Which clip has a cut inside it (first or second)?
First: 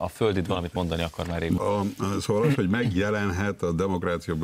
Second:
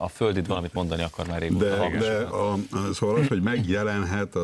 first